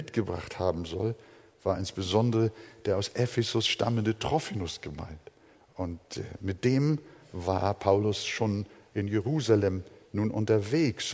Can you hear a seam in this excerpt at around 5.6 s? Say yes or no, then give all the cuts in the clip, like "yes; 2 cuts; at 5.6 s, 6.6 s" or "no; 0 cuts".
yes; 1 cut; at 5.6 s